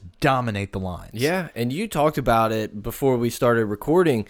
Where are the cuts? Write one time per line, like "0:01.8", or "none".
none